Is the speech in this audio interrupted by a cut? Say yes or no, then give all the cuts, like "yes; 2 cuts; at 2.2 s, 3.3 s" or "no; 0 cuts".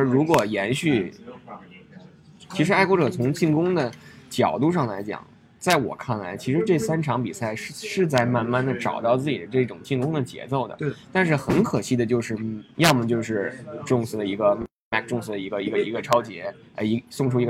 yes; 2 cuts; at 2.4 s, 12.7 s